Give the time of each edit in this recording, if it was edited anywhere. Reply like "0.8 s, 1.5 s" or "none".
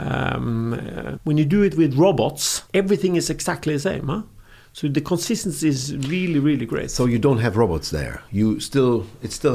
1.2 s, 2.7 s